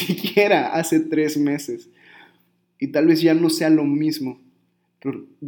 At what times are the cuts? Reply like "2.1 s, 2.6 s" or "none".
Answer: 2.6 s

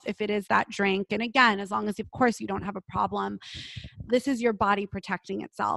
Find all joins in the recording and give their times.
4.1 s

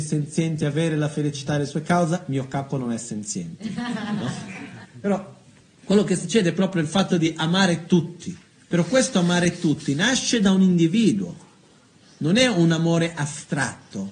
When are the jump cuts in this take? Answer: 4.8 s

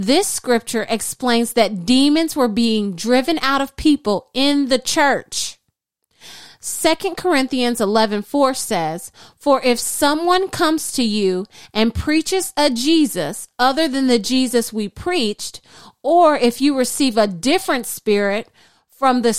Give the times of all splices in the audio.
none

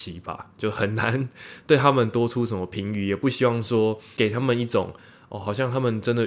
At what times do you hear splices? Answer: none

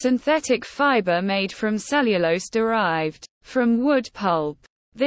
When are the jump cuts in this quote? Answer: 3.3 s

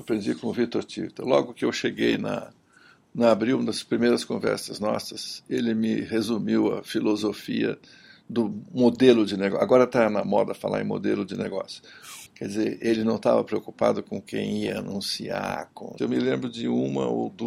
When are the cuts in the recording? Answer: 12.3 s, 16.0 s

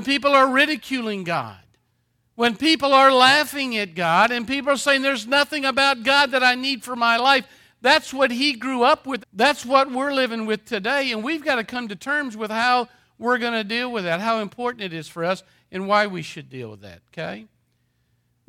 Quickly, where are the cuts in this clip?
9.2 s

